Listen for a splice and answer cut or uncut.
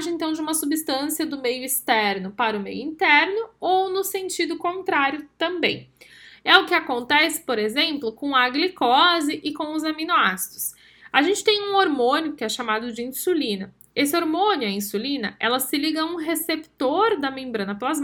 uncut